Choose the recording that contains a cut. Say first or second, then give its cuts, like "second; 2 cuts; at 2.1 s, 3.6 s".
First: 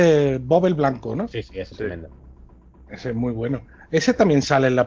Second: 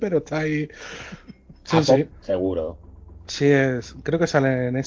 second; 1 cut; at 2.1 s